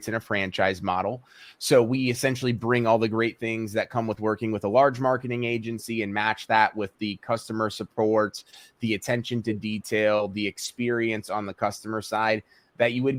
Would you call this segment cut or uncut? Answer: uncut